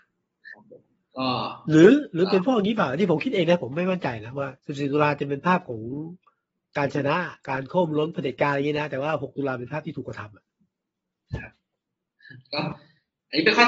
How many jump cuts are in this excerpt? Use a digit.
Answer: 2